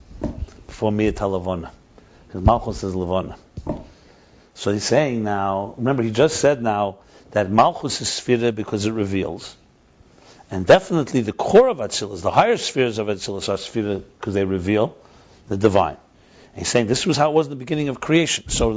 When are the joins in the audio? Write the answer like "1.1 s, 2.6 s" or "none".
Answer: none